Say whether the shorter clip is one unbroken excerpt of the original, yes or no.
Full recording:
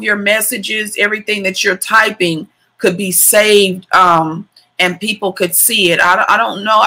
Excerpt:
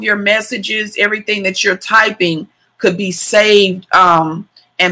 yes